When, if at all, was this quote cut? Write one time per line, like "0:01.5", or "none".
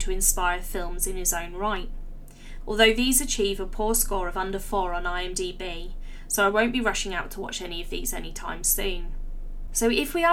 0:02.6